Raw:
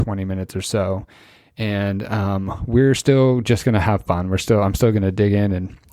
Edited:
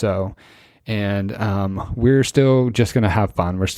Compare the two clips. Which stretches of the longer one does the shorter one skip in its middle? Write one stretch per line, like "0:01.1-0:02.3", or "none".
none